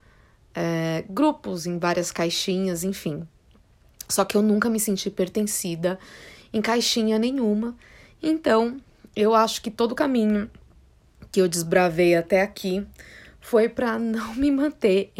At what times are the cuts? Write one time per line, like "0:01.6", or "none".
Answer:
none